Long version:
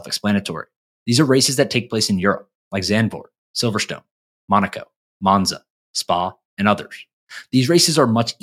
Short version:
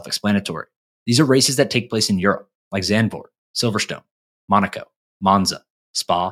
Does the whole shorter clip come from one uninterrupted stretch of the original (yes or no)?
yes